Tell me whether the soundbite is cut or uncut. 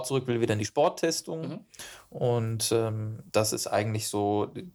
cut